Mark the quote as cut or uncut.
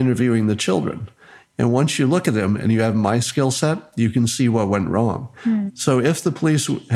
cut